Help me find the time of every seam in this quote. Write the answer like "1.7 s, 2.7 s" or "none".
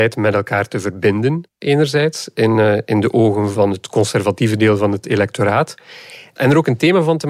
none